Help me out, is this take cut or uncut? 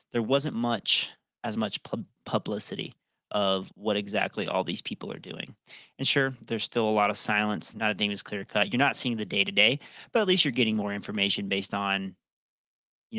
cut